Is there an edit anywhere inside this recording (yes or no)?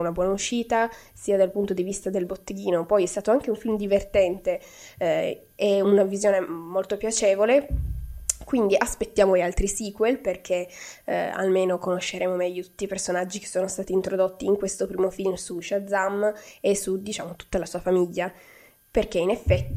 yes